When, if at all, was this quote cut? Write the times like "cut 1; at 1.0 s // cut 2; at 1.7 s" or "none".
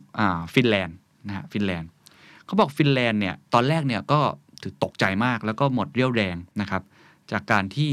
cut 1; at 6.5 s